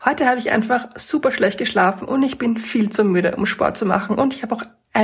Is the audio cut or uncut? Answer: uncut